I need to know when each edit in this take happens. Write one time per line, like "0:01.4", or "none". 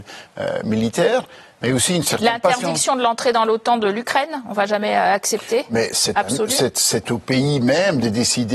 none